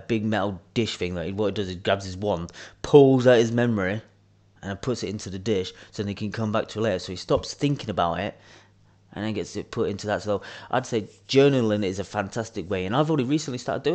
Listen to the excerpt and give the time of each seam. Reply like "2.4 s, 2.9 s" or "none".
none